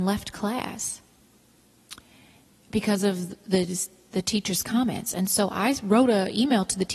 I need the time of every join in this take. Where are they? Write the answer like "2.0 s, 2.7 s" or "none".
none